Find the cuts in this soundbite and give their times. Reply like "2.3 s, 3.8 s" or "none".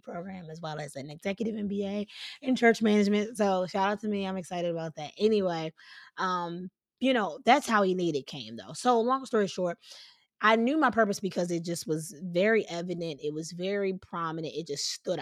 none